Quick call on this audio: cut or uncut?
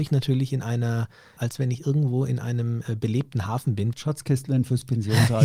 cut